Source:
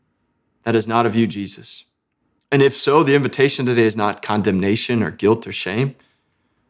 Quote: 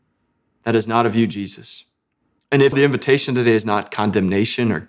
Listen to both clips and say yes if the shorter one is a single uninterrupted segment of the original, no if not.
no